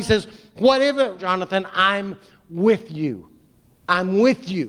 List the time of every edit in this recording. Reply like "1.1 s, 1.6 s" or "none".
1.2 s